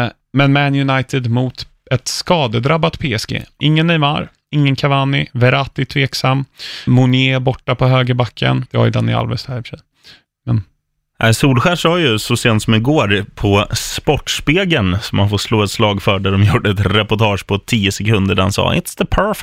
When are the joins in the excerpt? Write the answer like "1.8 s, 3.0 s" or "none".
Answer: 6.9 s, 8.7 s

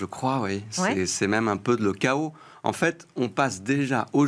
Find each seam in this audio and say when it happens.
none

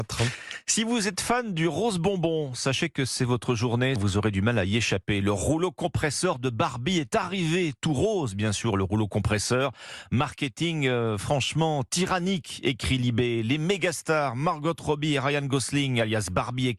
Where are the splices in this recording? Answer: 4.0 s

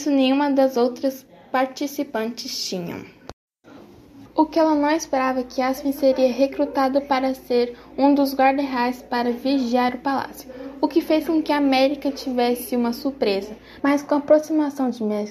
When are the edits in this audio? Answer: 4.3 s, 13.8 s

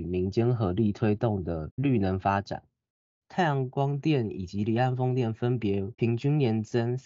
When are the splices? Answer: none

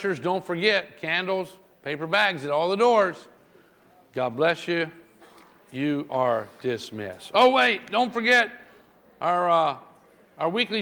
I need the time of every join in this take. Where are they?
none

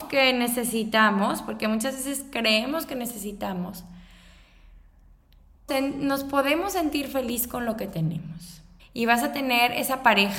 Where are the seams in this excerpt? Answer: 5.7 s, 8.8 s

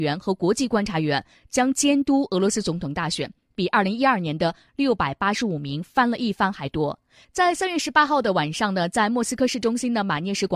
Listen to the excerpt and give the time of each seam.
7.2 s

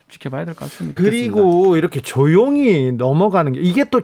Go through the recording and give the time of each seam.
1.0 s

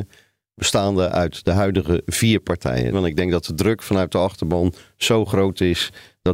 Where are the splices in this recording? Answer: 2.9 s

